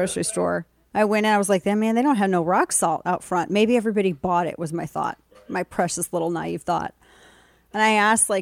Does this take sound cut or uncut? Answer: uncut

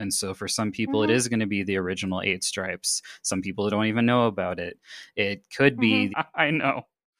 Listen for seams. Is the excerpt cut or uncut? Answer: cut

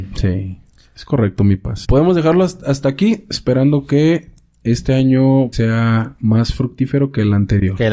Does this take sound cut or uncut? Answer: cut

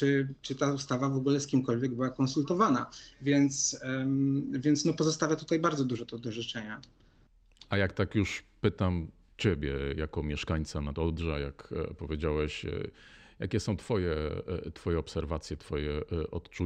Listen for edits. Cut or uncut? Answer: uncut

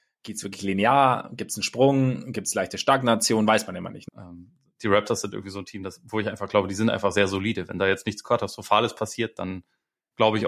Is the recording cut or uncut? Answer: cut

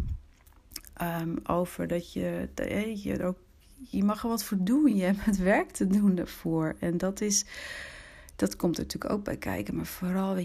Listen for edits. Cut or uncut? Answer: uncut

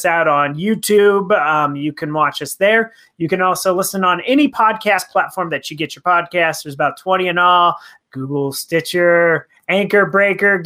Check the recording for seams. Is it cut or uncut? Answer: uncut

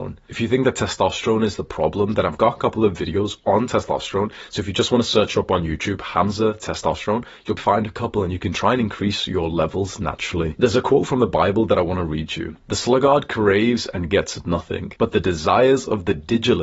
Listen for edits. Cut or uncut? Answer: cut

